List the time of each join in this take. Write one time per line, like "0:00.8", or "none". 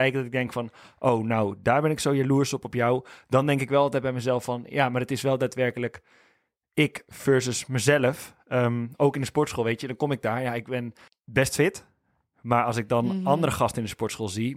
none